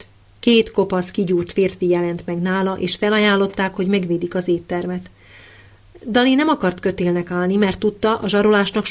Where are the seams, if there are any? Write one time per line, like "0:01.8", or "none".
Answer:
none